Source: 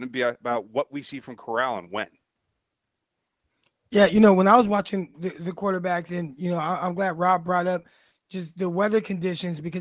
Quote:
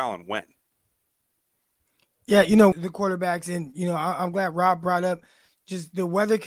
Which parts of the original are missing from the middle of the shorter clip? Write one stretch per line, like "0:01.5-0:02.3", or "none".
0:04.4-0:05.3